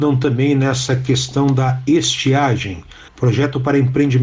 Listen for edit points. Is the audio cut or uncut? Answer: cut